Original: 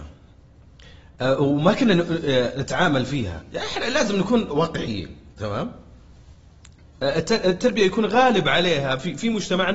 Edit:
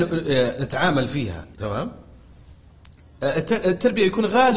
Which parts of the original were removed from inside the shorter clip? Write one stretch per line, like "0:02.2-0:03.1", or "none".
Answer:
0:03.5-0:05.3